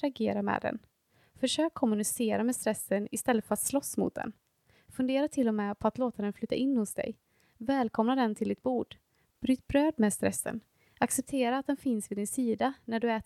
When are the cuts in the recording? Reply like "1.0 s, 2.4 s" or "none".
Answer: none